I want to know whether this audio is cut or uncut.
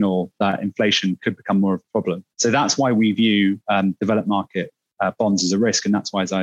cut